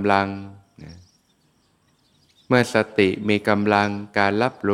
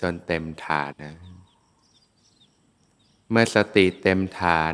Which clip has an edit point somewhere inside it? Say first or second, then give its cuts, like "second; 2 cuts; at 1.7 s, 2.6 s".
second; 1 cut; at 0.9 s